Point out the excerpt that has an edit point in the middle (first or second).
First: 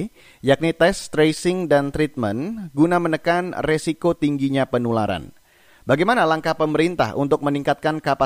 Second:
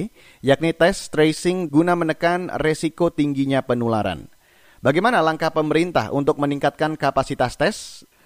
second